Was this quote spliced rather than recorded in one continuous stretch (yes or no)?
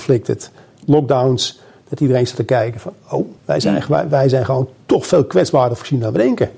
yes